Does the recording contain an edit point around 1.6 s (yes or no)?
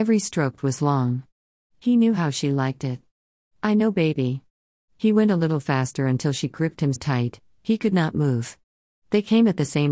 no